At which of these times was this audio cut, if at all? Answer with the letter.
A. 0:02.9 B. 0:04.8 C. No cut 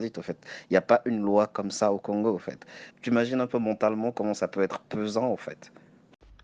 A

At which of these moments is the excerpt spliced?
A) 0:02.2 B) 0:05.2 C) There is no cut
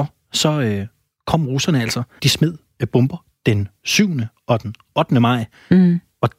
A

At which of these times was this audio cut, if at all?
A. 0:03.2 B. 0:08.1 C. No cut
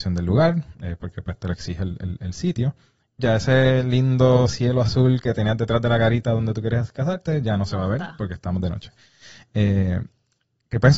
A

